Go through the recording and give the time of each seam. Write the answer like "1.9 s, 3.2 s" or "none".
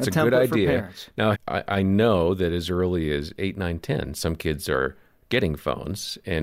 1.3 s

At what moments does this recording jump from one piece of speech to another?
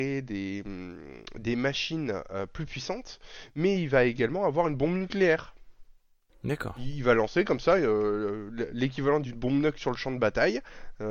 none

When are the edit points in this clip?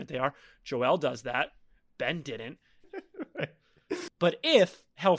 2.8 s, 4.1 s

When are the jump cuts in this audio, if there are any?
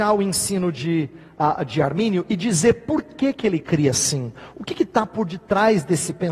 none

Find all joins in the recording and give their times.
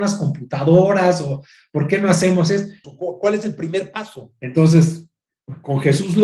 2.8 s

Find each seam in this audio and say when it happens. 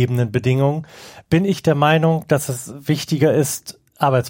none

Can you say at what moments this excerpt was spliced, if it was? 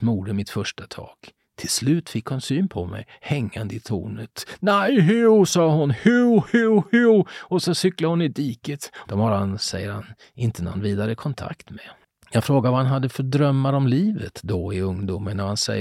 9.0 s

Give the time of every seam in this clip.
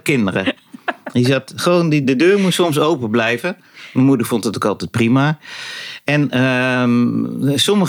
2.0 s

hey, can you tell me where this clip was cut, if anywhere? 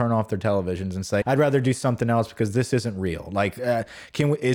1.2 s

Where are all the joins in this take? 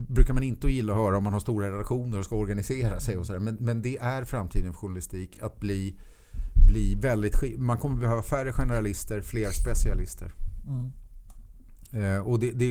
none

